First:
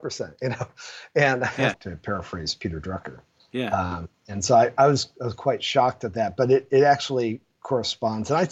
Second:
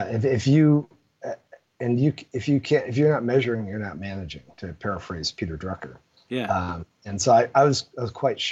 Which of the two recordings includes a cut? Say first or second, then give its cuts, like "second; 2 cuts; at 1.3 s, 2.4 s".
first; 1 cut; at 1.7 s